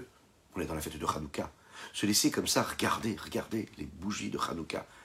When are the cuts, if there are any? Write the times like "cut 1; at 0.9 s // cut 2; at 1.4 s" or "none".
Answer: none